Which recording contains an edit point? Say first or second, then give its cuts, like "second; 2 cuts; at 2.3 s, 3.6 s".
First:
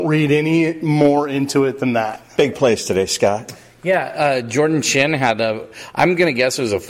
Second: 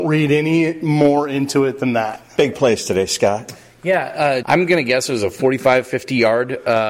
second; 1 cut; at 4.4 s